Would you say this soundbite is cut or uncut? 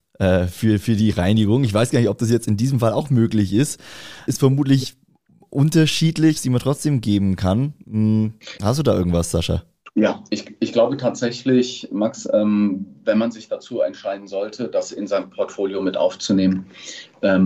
cut